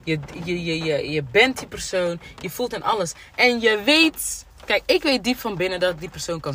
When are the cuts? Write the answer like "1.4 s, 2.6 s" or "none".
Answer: none